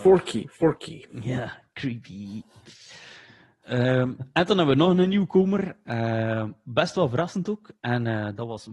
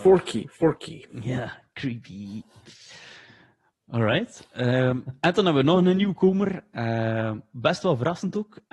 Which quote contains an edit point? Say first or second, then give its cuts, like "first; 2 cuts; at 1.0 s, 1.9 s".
first; 1 cut; at 3.6 s